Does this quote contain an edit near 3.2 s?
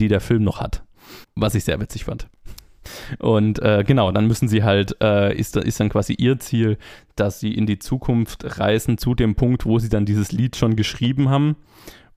no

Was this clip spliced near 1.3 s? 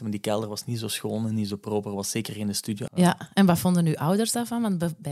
no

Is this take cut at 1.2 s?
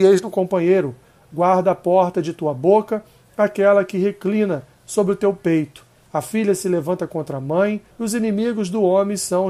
no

